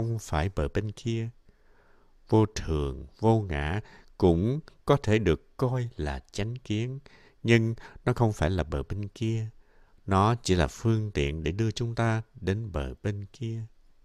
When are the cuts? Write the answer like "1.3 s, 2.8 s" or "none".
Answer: none